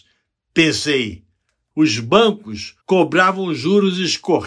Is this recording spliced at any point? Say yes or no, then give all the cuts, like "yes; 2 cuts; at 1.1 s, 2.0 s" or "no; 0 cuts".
yes; 2 cuts; at 1.7 s, 2.8 s